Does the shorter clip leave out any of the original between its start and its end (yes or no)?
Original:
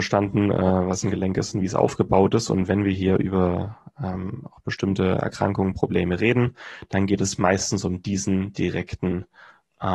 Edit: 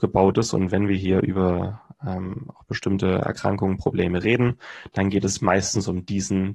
no